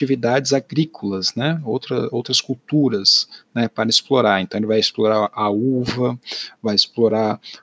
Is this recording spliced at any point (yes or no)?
no